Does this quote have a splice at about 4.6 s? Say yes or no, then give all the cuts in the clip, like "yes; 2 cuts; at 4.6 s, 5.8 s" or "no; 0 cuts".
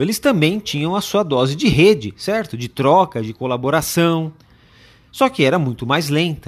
no; 0 cuts